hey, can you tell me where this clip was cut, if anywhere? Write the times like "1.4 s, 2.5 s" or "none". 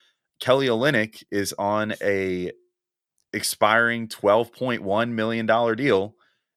none